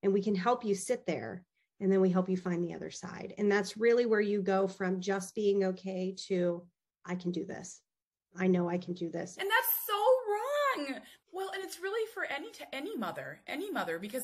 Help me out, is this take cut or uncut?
cut